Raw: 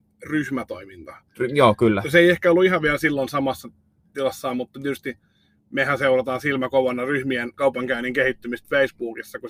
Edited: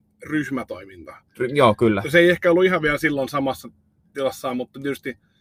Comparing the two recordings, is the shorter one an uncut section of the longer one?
yes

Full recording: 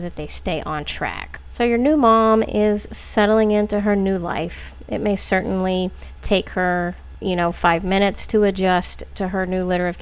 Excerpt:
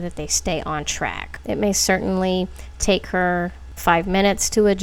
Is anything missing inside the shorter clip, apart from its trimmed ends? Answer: yes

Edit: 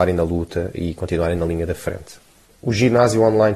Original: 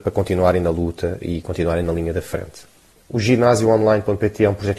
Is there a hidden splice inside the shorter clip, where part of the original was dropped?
no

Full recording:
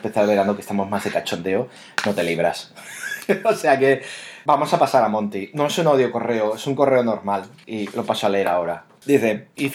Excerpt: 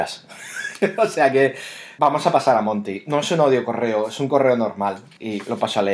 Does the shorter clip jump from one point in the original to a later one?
no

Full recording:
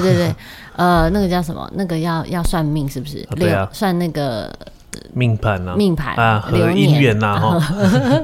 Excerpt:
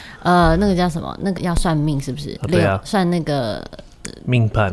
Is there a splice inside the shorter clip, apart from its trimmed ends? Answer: yes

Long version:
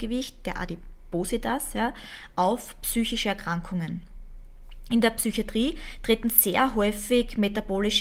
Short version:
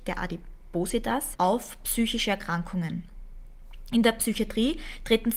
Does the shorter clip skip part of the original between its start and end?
yes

